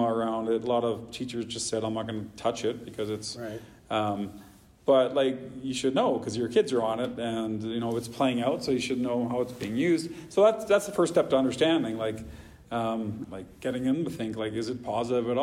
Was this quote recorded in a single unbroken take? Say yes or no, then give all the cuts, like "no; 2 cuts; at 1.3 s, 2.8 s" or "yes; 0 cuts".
no; 1 cut; at 13.2 s